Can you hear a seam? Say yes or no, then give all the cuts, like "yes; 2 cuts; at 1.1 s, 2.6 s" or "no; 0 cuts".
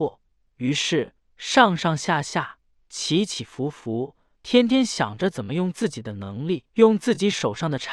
yes; 2 cuts; at 4.4 s, 6.7 s